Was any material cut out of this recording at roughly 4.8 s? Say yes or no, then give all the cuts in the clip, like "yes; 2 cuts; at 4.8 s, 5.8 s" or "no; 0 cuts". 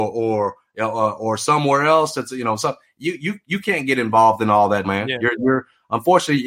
yes; 1 cut; at 4.8 s